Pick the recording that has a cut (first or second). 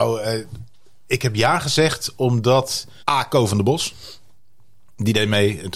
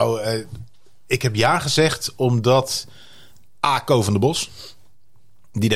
first